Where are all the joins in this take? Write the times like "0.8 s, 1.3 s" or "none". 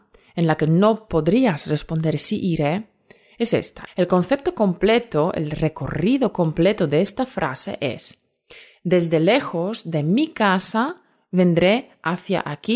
3.9 s